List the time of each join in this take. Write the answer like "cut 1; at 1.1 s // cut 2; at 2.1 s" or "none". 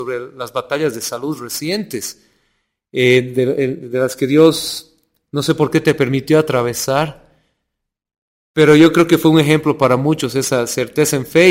none